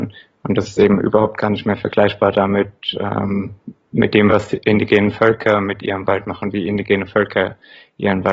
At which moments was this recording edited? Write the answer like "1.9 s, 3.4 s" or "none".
none